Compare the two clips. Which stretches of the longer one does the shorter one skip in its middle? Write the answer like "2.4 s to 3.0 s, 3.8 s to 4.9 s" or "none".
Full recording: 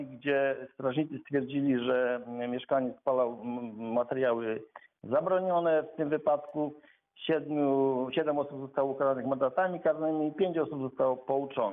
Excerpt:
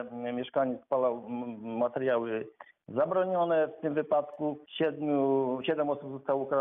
6.8 s to 7.1 s

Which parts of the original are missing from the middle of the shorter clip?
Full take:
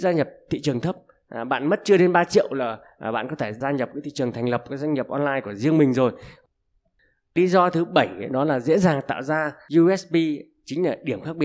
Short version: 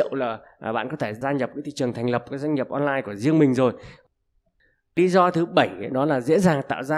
none

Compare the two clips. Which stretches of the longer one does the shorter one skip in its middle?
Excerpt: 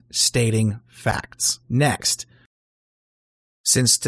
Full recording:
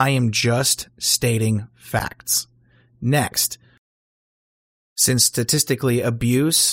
2.5 s to 3.0 s

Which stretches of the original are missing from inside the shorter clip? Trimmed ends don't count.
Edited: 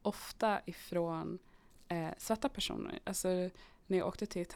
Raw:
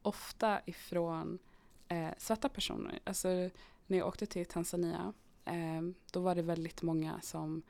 none

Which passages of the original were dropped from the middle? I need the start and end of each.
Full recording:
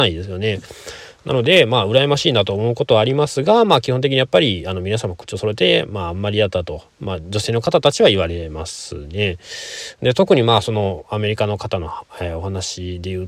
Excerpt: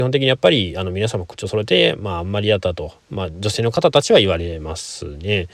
none

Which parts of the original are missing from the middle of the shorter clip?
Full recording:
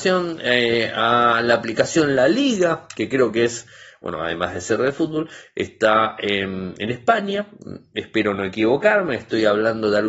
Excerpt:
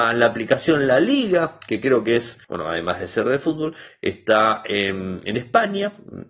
3.7 s to 4.0 s

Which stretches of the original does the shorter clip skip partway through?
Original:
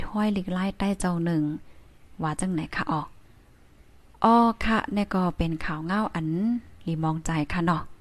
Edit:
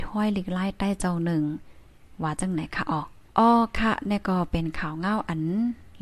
3.3 s to 4.1 s

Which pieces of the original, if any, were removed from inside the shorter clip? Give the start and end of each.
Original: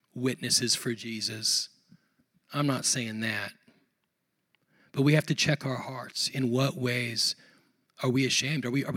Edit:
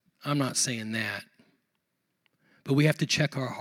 none

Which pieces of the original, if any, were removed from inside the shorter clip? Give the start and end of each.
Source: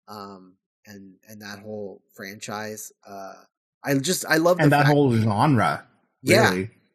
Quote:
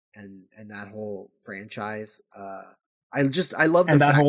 none

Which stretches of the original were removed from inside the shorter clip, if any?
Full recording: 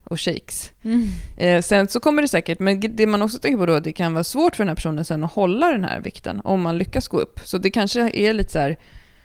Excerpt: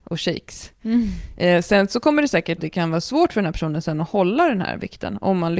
2.6 s to 3.8 s

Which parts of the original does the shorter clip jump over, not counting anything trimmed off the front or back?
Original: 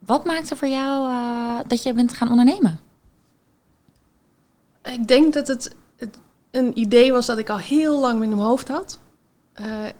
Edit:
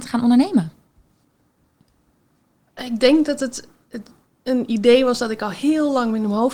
none

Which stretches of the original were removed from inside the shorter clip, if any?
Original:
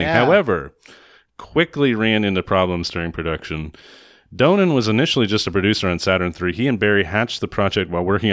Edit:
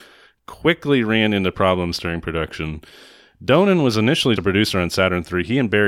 5.3 s to 5.4 s

